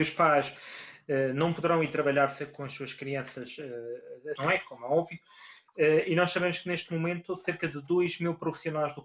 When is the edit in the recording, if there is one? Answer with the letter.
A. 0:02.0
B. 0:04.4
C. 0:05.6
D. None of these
B